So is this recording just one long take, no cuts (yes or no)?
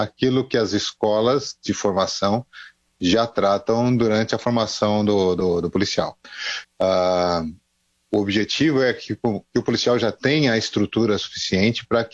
no